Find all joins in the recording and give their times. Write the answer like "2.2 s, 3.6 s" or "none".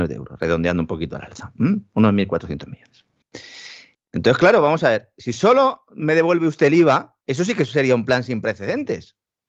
3.9 s, 7.2 s